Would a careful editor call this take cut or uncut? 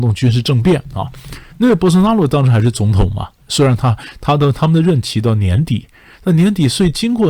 cut